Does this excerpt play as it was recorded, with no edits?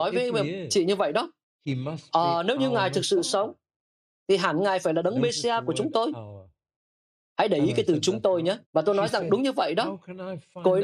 no; 1 cut; at 8.6 s

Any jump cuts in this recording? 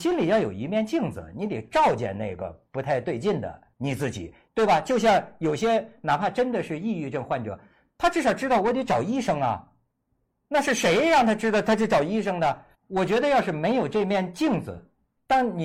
yes; 2 cuts; at 4.5 s, 12.7 s

